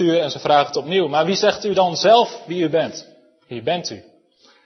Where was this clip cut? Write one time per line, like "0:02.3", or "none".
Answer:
none